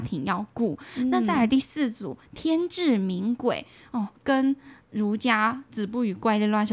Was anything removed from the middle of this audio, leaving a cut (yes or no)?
yes